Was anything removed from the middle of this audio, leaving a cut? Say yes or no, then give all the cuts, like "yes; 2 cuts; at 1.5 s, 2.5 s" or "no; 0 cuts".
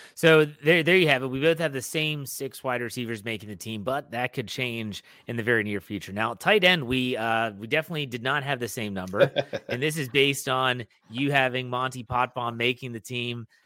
no; 0 cuts